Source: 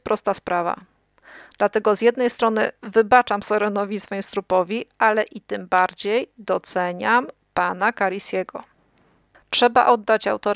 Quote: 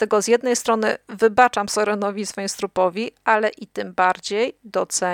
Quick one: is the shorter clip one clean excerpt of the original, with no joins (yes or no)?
yes